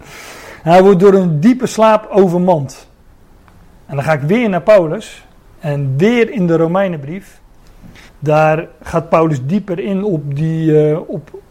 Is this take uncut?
no; 1 cut; at 8.1 s

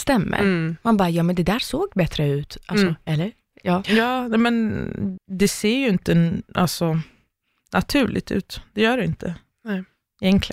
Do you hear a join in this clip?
yes; 1 cut; at 5.2 s

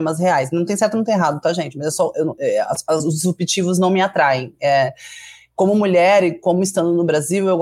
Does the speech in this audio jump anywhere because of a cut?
no; 0 cuts

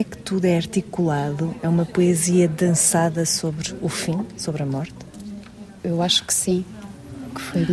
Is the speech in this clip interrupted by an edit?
no; 0 cuts

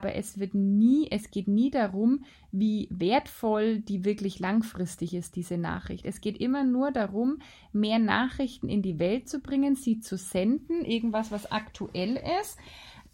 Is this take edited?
no; 0 cuts

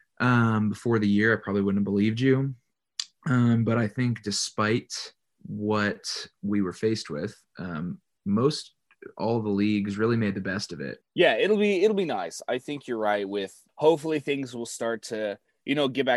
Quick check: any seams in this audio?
no; 0 cuts

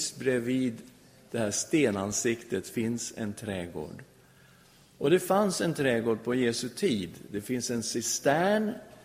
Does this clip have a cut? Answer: no; 0 cuts

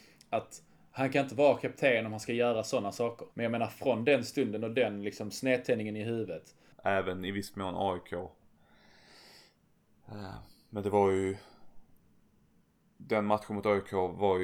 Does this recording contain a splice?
yes; 2 cuts; at 3.3 s, 6.7 s

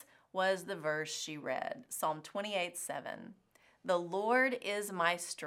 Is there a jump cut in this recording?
no; 0 cuts

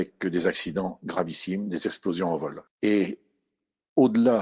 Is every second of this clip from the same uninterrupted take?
no; 1 cut; at 2.7 s

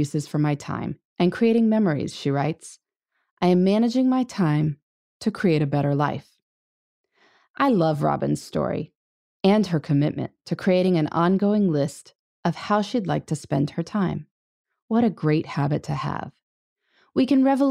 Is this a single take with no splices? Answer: yes; 0 cuts

